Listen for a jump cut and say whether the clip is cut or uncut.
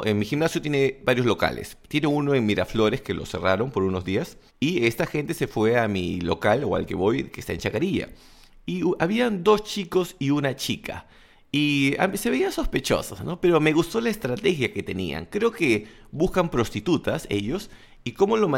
cut